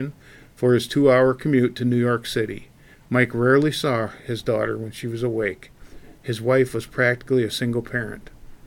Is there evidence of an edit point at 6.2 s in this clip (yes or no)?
no